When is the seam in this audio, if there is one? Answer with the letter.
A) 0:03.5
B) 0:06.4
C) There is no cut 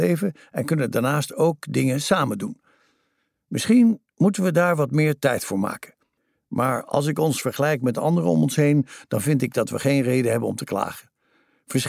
C